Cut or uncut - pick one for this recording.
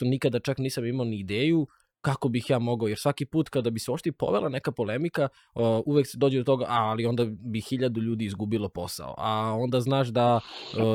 uncut